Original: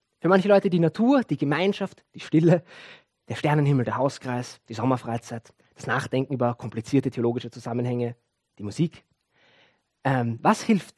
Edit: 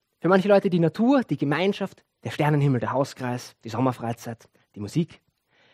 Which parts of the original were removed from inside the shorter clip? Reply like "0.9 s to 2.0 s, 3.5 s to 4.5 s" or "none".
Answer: 2.1 s to 3.1 s, 5.7 s to 8.5 s